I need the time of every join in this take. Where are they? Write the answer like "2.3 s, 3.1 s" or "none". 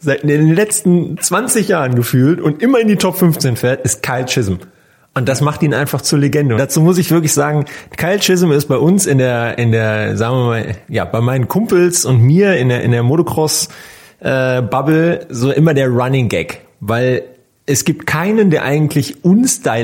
6.6 s